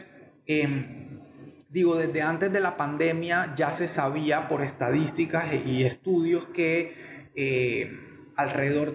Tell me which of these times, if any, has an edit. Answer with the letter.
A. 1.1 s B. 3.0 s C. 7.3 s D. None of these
D